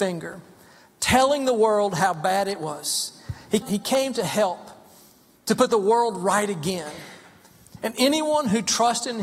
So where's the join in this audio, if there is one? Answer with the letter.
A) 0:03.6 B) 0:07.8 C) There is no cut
A